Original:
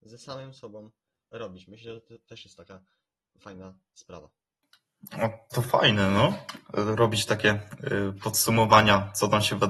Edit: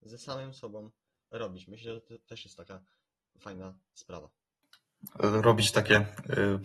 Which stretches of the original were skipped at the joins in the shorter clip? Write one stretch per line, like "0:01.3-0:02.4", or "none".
0:05.1-0:06.6